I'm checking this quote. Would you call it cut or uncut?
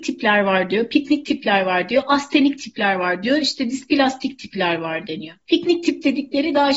uncut